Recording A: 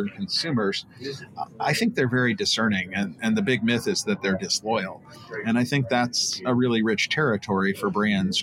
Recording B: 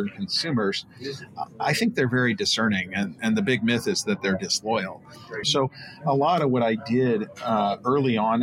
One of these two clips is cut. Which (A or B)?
B